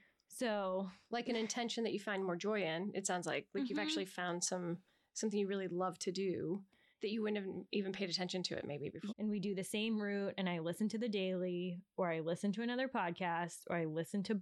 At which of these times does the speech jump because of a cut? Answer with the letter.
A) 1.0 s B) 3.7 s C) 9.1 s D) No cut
C